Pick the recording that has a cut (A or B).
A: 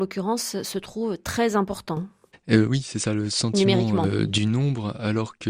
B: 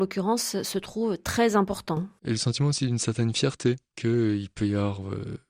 B